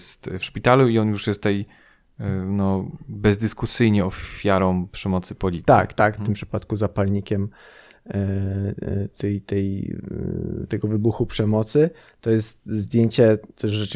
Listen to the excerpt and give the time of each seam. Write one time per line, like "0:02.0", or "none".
0:06.2